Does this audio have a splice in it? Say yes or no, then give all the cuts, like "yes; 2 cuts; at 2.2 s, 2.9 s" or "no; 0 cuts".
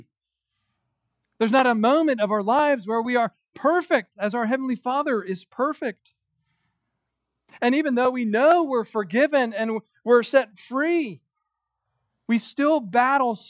no; 0 cuts